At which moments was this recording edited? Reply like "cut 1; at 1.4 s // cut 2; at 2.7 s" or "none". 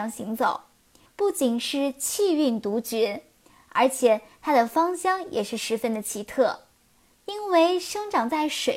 cut 1; at 1.1 s // cut 2; at 7.1 s